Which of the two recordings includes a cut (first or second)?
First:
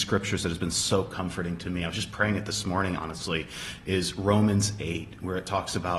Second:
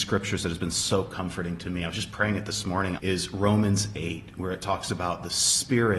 second